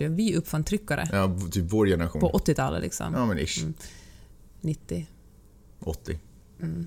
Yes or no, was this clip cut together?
no